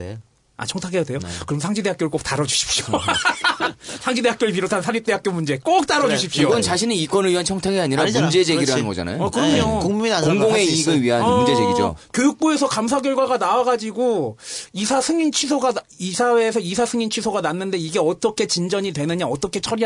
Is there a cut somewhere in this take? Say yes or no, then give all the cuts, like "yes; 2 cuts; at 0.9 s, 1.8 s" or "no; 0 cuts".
no; 0 cuts